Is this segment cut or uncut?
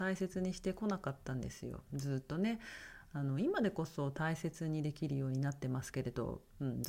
uncut